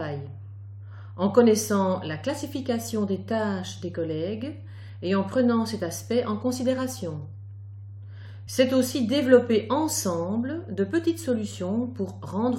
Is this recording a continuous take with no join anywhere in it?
yes; 0 cuts

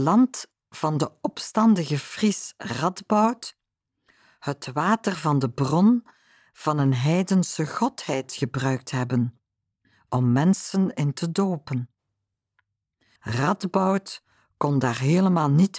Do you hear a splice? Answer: yes; 1 cut; at 13.2 s

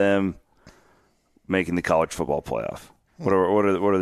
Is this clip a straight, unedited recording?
yes; 0 cuts

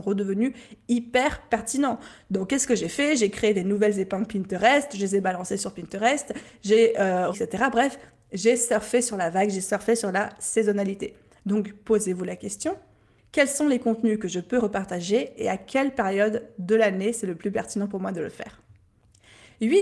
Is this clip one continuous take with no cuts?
no; 1 cut; at 7.3 s

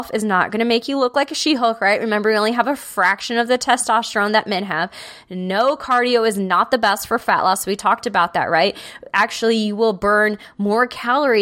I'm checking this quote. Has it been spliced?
no; 0 cuts

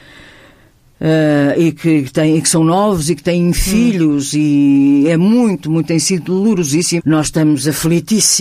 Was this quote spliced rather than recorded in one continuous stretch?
yes; 1 cut; at 7.0 s

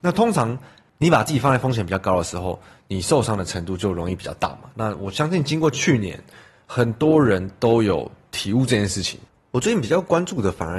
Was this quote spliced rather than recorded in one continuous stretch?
no; 0 cuts

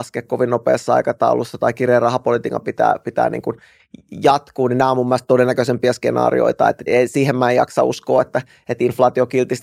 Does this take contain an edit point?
yes; 1 cut; at 6.9 s

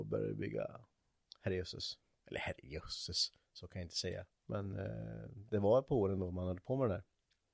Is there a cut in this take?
yes; 1 cut; at 4.4 s

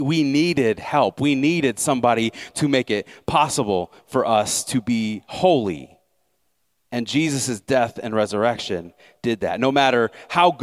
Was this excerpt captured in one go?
yes; 0 cuts

